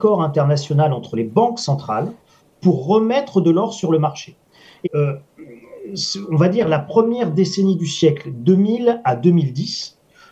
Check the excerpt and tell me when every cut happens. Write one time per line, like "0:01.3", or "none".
0:04.8